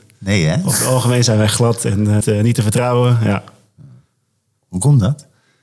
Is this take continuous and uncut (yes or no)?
no